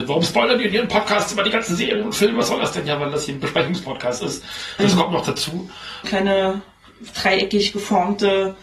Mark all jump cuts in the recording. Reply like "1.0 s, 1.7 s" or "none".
4.8 s, 6.0 s